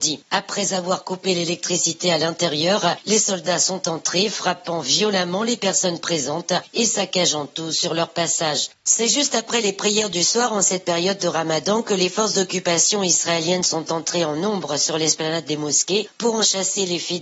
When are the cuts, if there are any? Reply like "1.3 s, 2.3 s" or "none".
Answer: 8.7 s